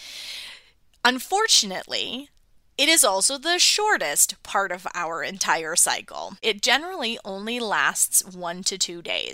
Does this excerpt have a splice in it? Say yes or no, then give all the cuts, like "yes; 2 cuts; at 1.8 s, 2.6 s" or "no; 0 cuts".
no; 0 cuts